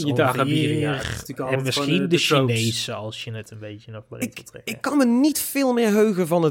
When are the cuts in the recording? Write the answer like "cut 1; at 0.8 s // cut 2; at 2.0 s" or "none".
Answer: none

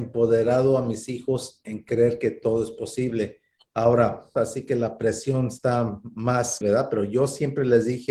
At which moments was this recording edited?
cut 1; at 4.4 s // cut 2; at 6.6 s

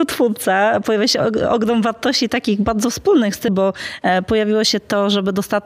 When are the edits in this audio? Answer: cut 1; at 3.5 s

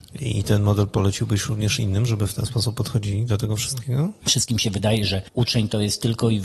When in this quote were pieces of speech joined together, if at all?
cut 1; at 4.2 s

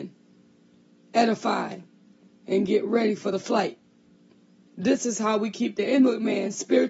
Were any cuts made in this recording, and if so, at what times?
cut 1; at 4.7 s

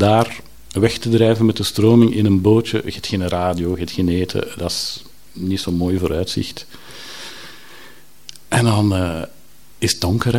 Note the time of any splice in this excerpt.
none

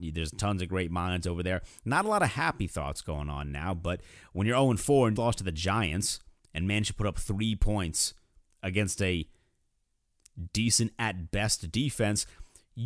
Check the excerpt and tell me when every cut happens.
cut 1; at 5.2 s

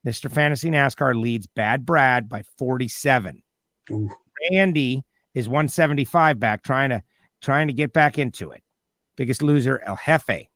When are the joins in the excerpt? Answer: cut 1; at 9.1 s

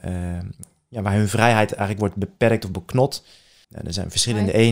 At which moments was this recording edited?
cut 1; at 3.6 s

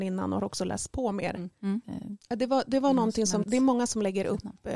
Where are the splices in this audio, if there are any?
cut 1; at 1.8 s // cut 2; at 3.4 s

